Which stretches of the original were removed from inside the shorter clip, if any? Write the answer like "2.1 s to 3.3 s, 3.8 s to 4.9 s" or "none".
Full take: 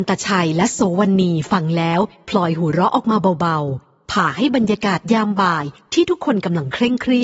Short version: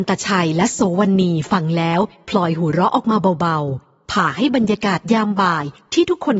none